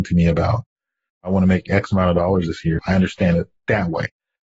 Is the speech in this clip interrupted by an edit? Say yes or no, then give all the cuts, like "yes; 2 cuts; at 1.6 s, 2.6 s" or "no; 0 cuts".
yes; 1 cut; at 2.8 s